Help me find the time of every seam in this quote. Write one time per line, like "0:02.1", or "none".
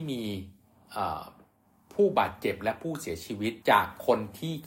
0:03.6

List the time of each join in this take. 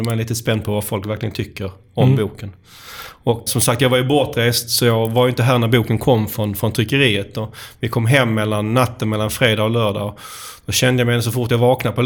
0:03.5

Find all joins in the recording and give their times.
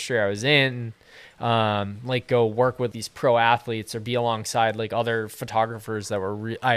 0:02.9

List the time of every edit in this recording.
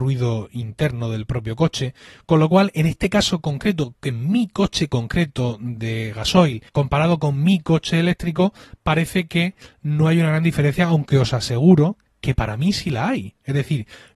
0:06.7

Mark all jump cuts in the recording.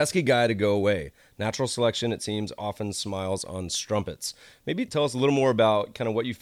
none

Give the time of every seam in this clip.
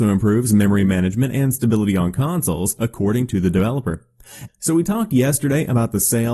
0:02.8
0:04.5

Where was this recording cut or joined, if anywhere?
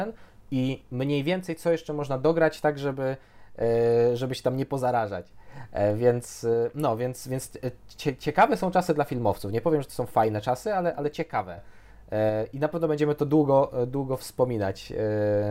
none

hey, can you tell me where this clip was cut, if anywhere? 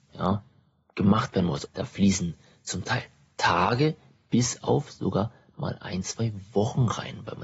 0:01.7

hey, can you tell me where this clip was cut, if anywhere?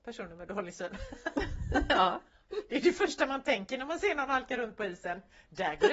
none

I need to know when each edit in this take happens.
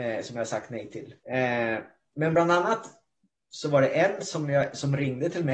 0:01.2

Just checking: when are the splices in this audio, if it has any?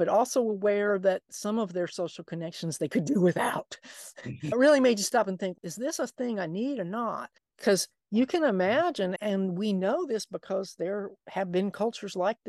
0:07.4

